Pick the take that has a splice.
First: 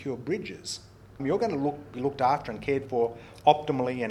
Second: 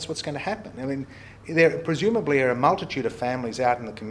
first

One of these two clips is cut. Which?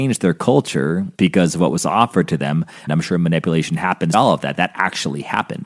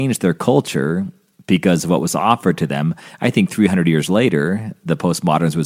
first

